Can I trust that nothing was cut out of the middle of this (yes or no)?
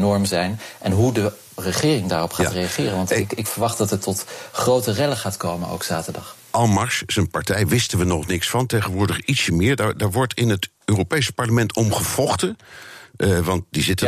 yes